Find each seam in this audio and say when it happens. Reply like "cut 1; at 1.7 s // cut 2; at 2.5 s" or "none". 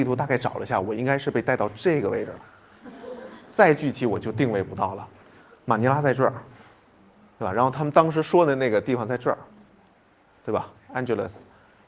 none